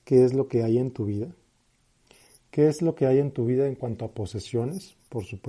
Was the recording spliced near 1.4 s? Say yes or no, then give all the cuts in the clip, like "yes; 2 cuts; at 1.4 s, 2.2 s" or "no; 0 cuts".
no; 0 cuts